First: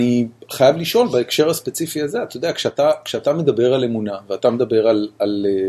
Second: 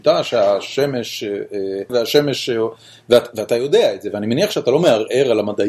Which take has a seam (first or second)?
second